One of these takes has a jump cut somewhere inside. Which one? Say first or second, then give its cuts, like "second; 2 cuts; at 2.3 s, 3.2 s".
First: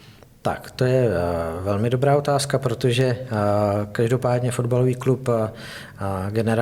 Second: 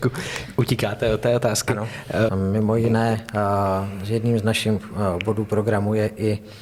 second; 1 cut; at 2.3 s